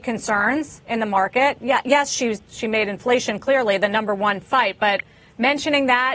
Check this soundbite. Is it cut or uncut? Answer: uncut